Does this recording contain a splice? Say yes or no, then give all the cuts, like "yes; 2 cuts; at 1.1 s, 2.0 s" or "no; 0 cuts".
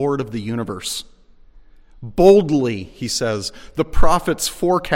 no; 0 cuts